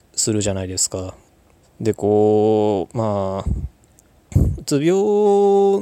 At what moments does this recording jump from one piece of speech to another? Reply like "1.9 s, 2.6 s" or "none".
1.6 s